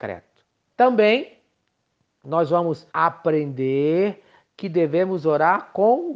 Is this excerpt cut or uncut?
cut